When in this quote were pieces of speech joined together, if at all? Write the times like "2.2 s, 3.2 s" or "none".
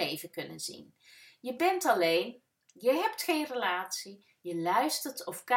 4.4 s